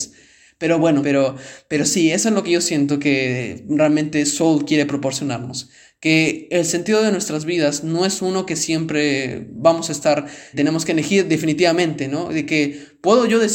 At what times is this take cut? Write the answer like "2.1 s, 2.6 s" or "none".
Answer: 1.0 s, 10.5 s